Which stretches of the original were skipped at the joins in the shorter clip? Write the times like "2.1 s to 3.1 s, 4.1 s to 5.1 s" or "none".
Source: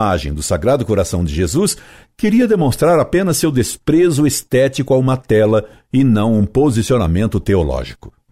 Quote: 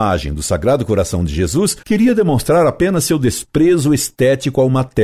1.8 s to 2.1 s